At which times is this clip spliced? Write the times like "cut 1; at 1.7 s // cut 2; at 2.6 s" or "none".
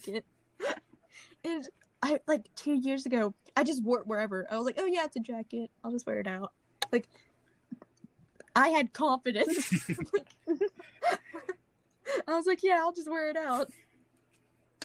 none